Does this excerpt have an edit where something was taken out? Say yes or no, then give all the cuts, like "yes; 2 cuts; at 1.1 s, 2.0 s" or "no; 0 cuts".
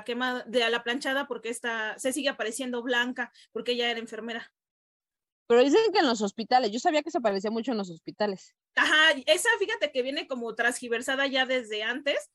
no; 0 cuts